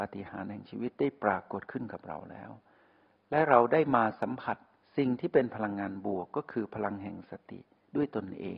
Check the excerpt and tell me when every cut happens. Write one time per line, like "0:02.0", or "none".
none